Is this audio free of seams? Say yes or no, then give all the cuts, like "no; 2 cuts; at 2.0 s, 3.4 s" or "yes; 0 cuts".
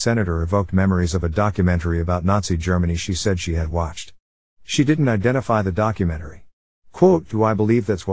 yes; 0 cuts